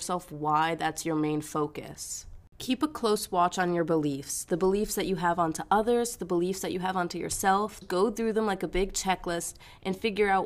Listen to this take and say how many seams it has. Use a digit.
1